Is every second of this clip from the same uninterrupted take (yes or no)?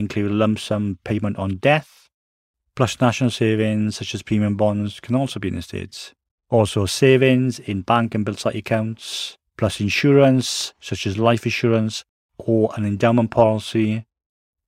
no